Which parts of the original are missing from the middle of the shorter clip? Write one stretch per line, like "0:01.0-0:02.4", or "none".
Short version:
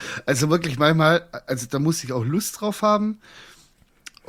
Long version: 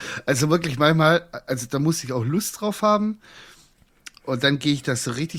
none